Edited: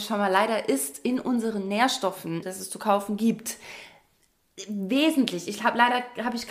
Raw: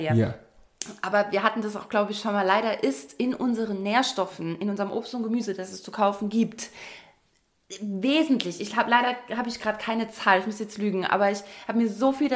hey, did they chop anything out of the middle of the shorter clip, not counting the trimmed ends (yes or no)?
yes